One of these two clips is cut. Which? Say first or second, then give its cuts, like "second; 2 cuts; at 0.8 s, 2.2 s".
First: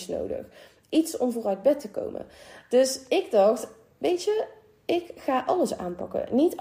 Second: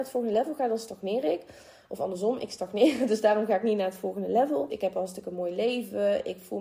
second; 1 cut; at 4.7 s